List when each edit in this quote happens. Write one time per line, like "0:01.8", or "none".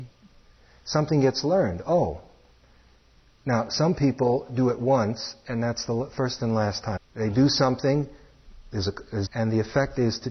0:07.0
0:09.3